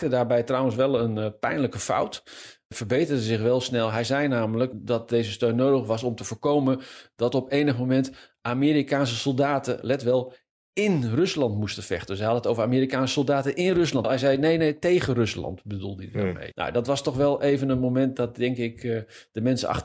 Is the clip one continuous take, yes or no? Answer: no